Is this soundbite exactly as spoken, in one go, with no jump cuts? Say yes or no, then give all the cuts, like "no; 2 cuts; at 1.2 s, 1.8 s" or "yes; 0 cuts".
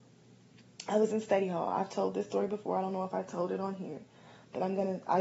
yes; 0 cuts